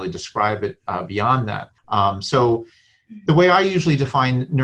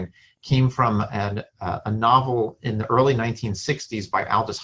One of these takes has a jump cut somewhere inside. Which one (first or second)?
first